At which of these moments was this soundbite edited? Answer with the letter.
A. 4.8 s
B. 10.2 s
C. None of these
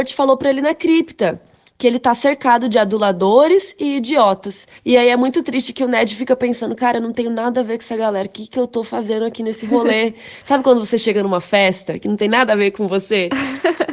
A